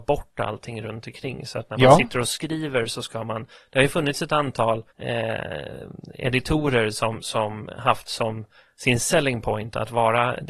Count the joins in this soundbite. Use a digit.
1